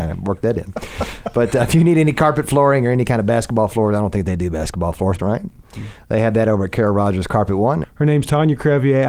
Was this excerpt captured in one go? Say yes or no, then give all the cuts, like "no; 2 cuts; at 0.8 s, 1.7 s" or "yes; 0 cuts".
no; 2 cuts; at 5.2 s, 7.8 s